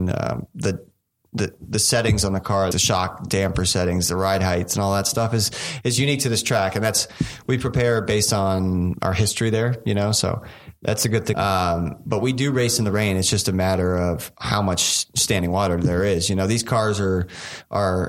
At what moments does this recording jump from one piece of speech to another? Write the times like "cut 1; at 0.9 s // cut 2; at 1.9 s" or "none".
cut 1; at 2.7 s // cut 2; at 11.3 s